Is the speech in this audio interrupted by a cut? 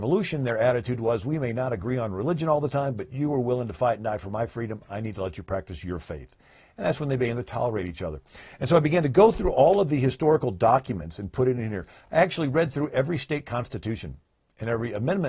no; 0 cuts

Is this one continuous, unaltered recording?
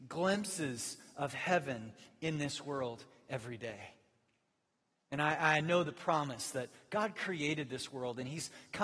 yes; 0 cuts

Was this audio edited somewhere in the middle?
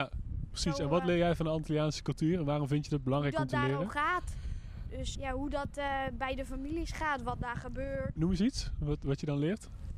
yes; 2 cuts; at 5.1 s, 8.2 s

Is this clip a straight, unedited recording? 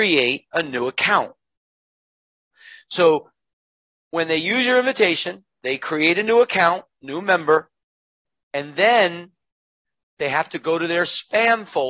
yes; 0 cuts

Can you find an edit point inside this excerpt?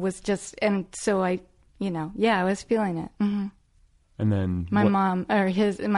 yes; 1 cut; at 3.1 s

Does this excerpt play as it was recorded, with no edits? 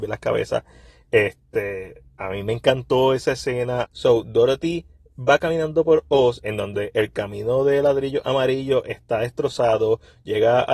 no; 1 cut; at 3.8 s

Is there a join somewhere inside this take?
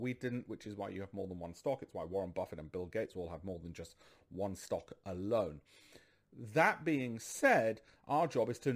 no; 0 cuts

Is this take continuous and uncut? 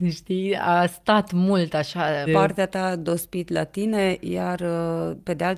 no; 1 cut; at 2.3 s

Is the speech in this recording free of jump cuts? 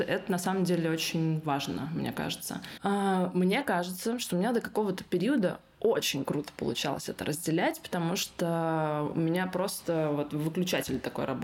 no; 1 cut; at 2.8 s

